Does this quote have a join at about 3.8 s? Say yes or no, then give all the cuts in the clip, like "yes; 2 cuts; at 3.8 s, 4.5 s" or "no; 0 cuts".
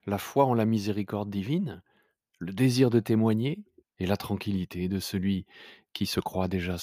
yes; 1 cut; at 3.8 s